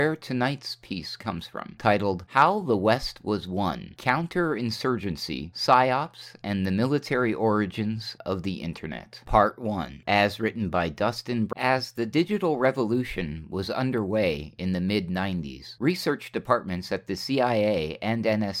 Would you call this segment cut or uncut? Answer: cut